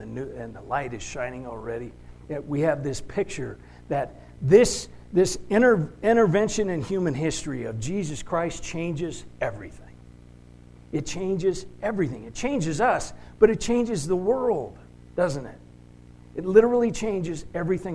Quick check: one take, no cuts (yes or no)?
no